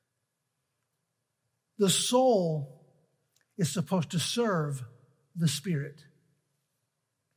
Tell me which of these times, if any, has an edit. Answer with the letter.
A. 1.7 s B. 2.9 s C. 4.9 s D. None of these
D